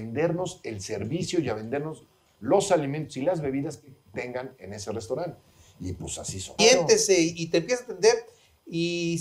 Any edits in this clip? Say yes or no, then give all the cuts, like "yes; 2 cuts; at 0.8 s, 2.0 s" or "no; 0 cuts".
yes; 1 cut; at 6.6 s